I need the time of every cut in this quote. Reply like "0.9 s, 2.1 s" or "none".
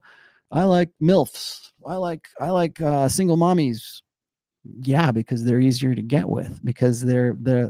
none